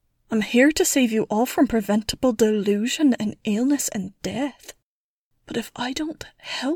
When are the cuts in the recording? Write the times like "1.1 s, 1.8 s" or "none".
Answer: 5.3 s